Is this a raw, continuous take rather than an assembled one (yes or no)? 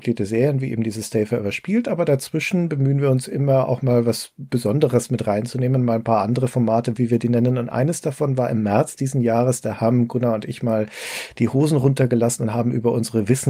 no